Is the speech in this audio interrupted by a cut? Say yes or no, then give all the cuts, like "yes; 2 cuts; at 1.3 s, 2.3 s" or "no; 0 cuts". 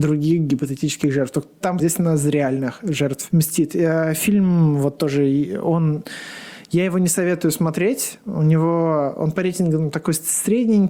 yes; 1 cut; at 1.8 s